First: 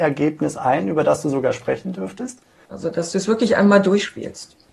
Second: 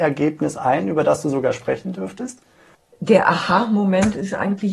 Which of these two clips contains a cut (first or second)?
first